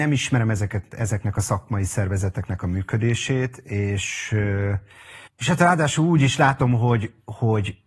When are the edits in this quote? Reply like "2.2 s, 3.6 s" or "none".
5.3 s

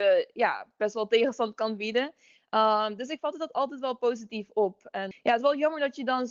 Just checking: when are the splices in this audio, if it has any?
5.1 s

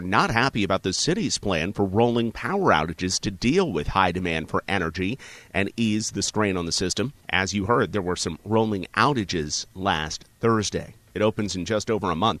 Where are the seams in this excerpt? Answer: 7.2 s, 11.1 s

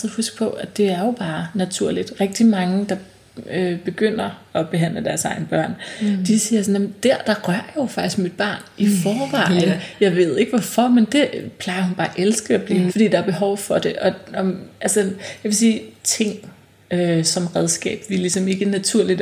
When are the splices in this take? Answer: 12.9 s, 16.0 s

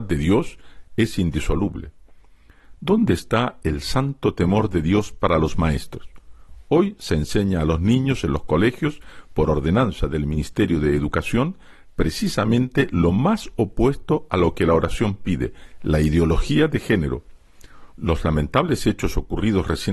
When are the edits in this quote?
17.9 s

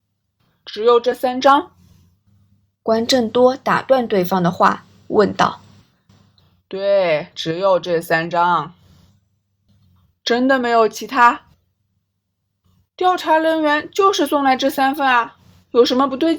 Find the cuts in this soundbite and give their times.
none

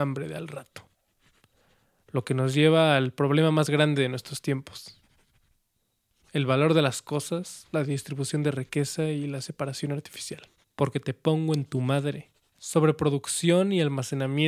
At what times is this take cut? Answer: 10.6 s, 12.5 s

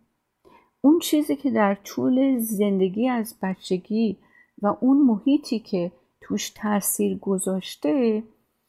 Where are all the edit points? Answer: none

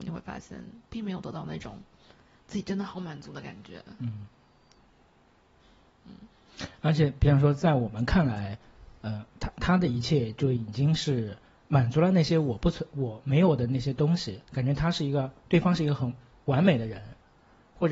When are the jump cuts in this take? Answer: none

